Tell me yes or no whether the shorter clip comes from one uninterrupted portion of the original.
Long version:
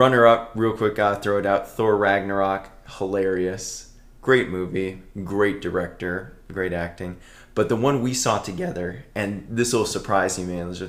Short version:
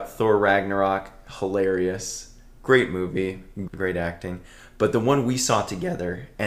no